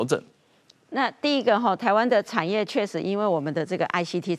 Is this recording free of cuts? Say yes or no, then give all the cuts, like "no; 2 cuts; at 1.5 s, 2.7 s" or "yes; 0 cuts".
yes; 0 cuts